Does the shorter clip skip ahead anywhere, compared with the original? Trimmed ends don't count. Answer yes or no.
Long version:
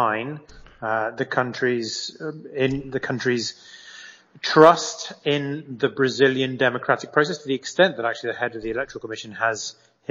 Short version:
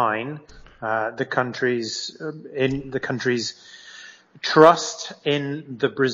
no